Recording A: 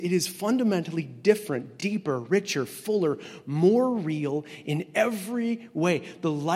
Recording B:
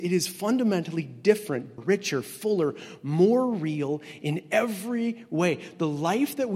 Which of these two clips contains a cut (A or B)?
B